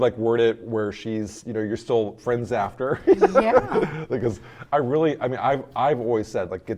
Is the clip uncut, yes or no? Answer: yes